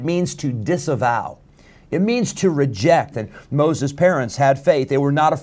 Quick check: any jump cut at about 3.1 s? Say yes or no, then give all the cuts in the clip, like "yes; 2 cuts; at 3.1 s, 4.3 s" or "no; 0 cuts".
yes; 1 cut; at 3.1 s